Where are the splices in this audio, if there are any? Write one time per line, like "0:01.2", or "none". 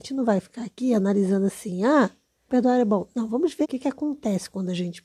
0:02.5
0:03.6